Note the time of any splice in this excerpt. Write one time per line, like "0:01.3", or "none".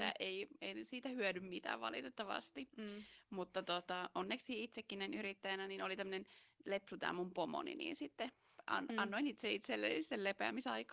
none